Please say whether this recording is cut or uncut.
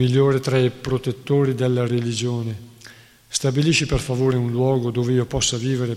uncut